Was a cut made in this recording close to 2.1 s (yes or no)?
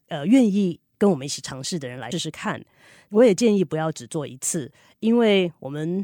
yes